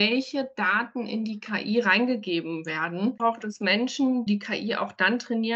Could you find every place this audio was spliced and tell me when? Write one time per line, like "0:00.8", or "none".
0:03.2
0:04.3